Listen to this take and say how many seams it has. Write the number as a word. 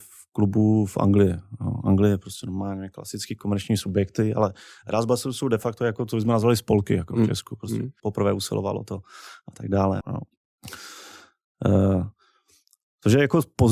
two